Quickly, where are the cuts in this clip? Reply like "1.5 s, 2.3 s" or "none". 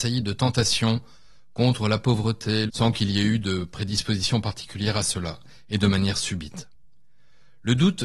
2.7 s

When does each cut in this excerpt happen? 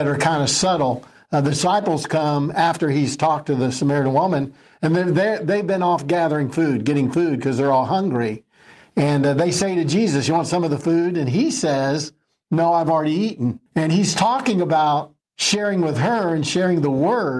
13.7 s, 15.2 s

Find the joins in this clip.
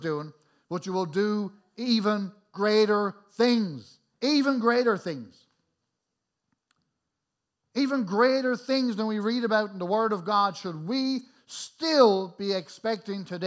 4.1 s

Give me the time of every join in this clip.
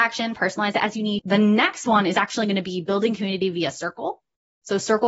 1.2 s

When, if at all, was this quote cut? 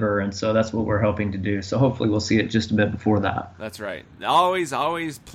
none

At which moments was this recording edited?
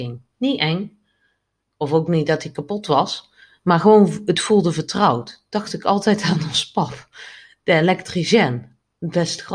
none

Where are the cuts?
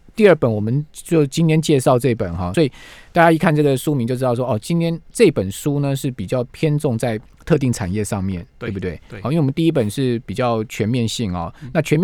2.5 s

